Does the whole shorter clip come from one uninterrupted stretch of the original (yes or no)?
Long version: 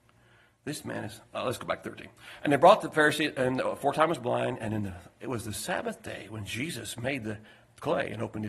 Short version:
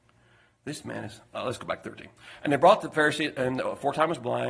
yes